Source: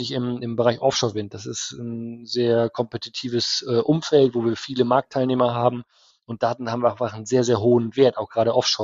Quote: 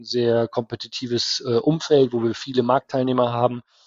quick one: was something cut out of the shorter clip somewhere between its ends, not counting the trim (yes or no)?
no